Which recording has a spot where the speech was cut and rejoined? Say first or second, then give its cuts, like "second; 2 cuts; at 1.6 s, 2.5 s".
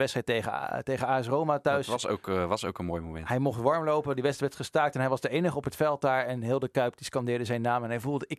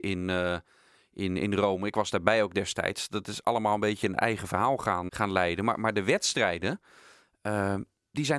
second; 1 cut; at 5.1 s